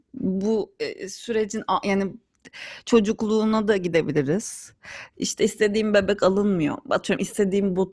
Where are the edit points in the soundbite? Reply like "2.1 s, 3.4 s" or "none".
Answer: 5.1 s